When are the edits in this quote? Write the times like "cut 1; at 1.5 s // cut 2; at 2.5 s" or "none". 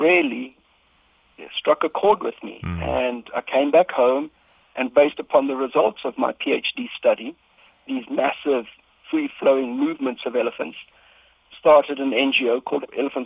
none